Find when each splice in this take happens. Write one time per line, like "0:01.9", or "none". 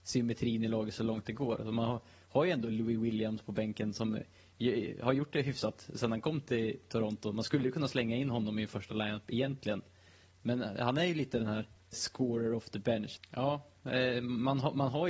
0:11.9
0:13.2